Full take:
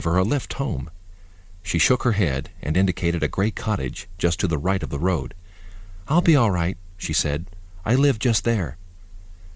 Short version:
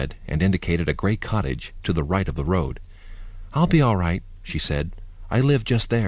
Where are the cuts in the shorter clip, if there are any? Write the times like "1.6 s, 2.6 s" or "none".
1.8 s